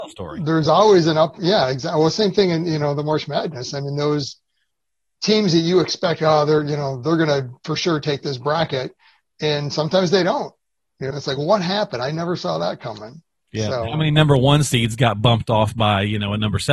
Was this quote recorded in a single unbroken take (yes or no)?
no